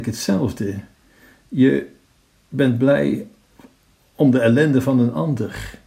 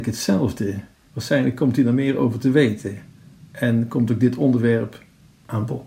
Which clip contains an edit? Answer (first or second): second